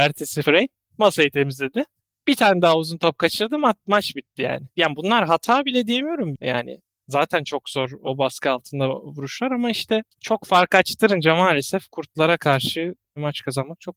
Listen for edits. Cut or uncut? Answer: cut